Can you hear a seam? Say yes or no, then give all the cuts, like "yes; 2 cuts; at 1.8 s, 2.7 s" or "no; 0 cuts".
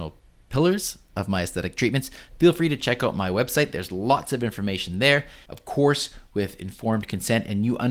yes; 1 cut; at 5.5 s